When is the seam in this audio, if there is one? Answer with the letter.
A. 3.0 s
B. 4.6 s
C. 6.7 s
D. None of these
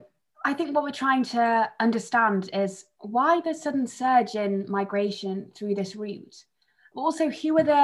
D